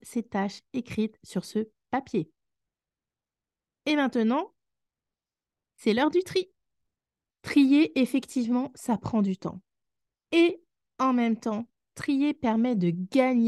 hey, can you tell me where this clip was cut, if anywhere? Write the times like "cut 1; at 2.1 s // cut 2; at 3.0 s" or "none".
cut 1; at 7.3 s